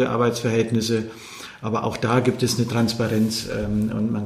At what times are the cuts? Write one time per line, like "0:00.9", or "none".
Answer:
none